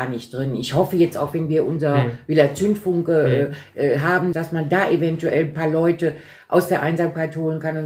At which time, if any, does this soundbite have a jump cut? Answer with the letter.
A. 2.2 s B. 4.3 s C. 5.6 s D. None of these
B